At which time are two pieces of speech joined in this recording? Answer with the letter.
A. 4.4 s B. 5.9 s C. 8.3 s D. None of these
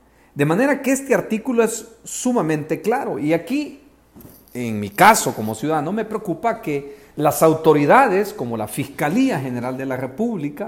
D